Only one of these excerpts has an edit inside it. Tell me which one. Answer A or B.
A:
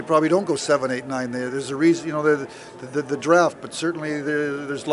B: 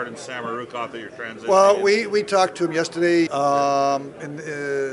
B